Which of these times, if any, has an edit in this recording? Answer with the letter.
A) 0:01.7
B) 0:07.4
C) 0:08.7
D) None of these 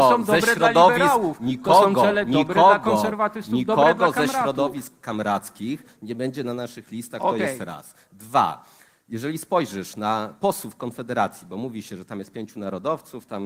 D